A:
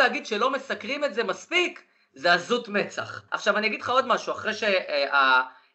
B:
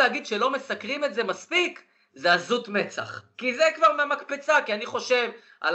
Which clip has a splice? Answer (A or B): A